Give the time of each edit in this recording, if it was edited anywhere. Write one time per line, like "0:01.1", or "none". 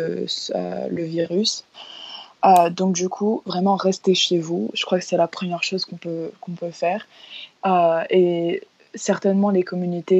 0:07.5